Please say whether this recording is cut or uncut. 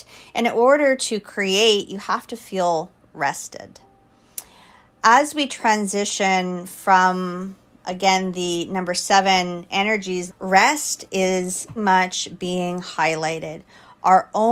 cut